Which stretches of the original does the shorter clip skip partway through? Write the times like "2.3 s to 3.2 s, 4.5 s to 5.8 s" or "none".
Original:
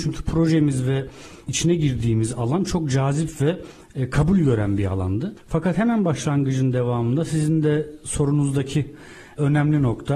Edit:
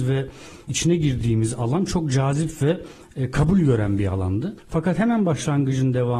none